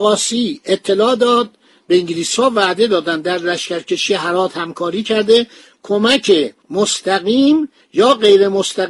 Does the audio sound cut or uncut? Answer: cut